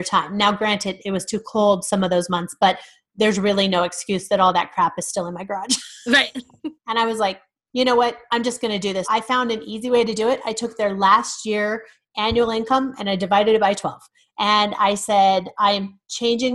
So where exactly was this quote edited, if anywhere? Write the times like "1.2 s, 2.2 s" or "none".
6.7 s, 9.0 s